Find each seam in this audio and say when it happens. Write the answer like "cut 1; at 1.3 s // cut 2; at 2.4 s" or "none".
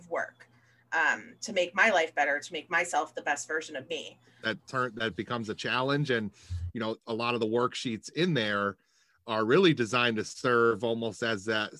cut 1; at 4.4 s